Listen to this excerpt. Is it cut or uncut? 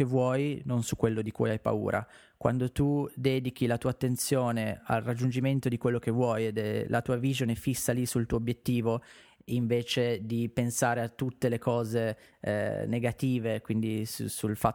uncut